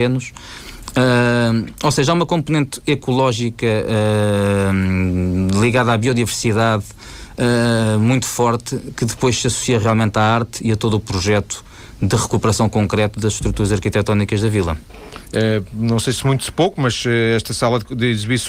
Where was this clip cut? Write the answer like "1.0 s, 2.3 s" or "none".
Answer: 15.3 s